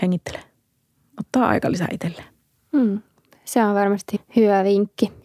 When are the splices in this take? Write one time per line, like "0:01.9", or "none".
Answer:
0:04.2